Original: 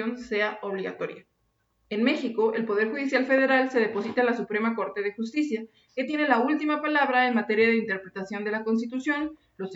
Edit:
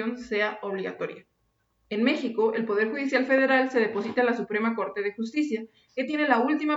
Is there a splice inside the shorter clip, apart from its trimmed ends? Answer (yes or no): no